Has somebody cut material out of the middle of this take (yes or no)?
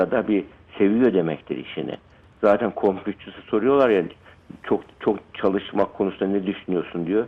no